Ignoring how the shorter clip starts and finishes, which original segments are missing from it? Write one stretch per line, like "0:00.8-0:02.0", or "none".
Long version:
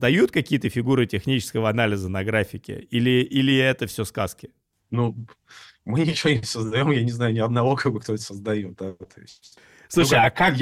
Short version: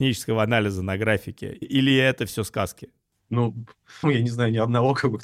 0:02.9-0:03.2
0:05.6-0:06.8